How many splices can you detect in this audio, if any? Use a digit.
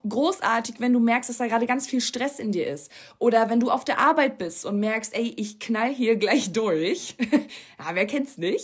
0